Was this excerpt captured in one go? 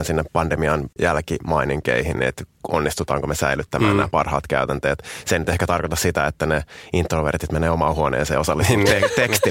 yes; 0 cuts

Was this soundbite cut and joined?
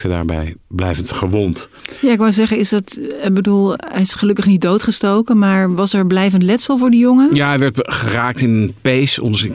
no; 0 cuts

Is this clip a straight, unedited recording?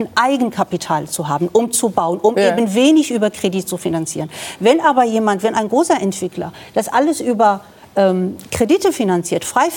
yes; 0 cuts

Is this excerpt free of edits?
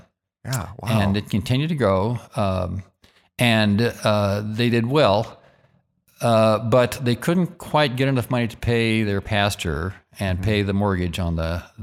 yes; 0 cuts

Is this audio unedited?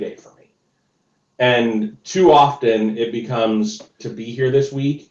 no; 1 cut; at 4.0 s

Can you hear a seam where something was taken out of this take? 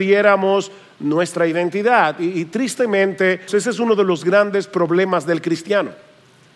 yes; 1 cut; at 3.5 s

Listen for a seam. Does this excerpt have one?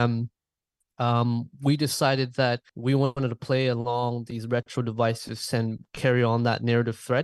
yes; 1 cut; at 2.7 s

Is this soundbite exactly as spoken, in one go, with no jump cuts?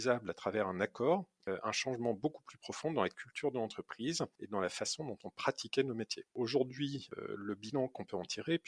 yes; 0 cuts

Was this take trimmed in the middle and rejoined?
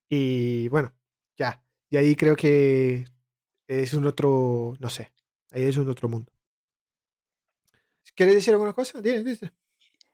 yes; 1 cut; at 8.0 s

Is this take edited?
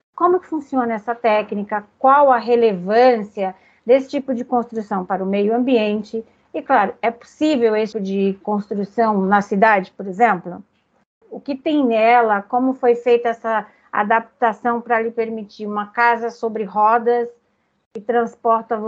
yes; 2 cuts; at 7.9 s, 11.2 s

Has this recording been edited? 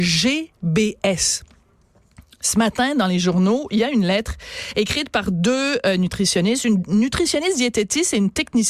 no; 0 cuts

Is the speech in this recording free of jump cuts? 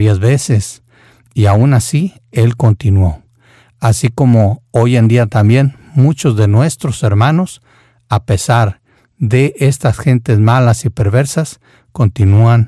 yes; 0 cuts

